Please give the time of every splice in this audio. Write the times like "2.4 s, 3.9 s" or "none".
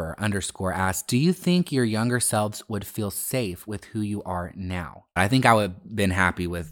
5.2 s